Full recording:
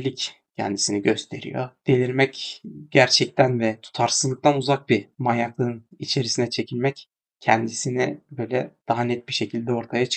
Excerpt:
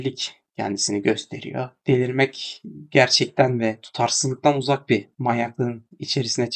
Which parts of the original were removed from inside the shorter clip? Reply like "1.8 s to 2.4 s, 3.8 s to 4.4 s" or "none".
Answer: none